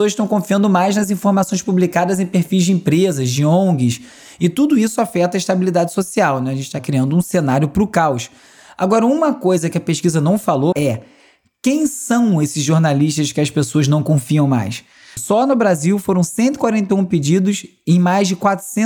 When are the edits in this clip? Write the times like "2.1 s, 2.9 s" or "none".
10.7 s, 15.2 s